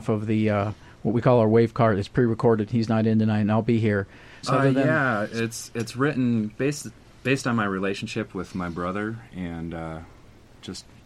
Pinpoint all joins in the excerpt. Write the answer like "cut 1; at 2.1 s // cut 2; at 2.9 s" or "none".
cut 1; at 4.4 s